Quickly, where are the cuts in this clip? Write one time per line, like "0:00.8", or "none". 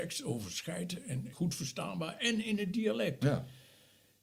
0:01.3